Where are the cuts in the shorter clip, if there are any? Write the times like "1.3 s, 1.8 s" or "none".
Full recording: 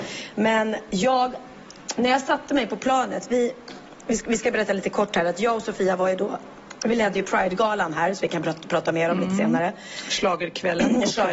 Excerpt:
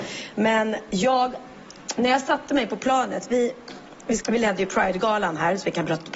4.2 s